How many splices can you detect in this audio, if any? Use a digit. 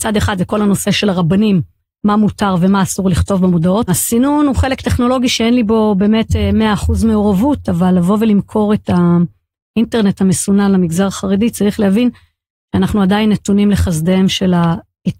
1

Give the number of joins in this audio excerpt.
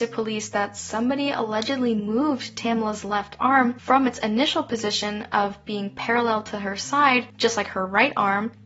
0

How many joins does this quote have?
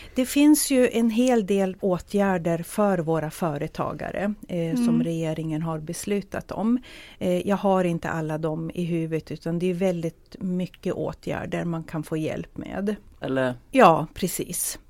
2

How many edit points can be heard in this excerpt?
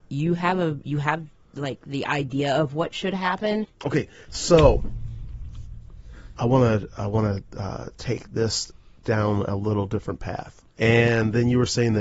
2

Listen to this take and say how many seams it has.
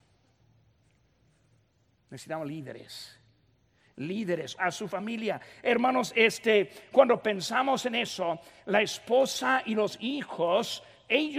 1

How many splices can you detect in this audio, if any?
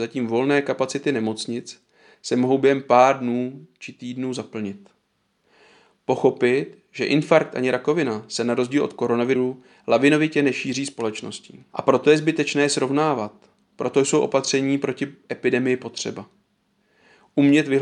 1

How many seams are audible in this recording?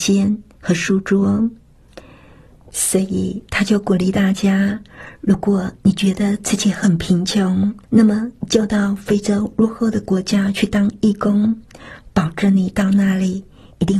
2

